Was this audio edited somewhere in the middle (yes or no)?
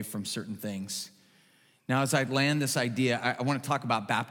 no